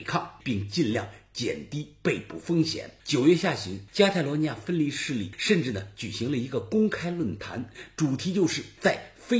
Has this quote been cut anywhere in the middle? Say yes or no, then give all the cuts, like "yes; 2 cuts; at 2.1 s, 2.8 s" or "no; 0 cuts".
no; 0 cuts